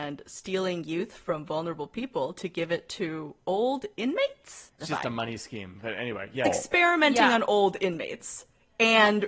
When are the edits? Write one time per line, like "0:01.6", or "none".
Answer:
0:04.8
0:06.4